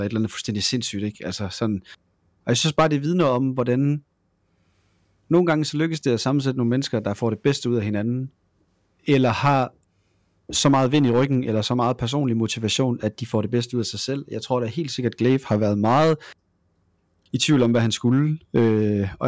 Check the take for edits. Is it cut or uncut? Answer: uncut